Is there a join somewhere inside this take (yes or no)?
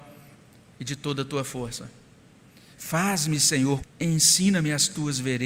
yes